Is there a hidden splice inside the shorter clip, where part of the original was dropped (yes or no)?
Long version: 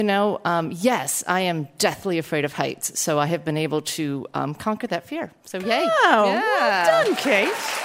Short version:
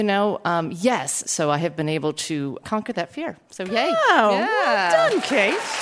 yes